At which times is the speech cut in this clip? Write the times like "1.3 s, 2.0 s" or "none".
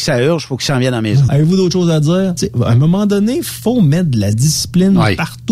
1.3 s, 2.4 s, 4.3 s